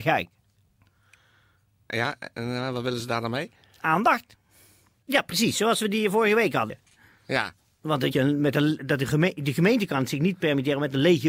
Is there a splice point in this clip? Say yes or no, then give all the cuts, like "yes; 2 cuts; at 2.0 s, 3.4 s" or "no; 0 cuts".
yes; 2 cuts; at 5.0 s, 8.1 s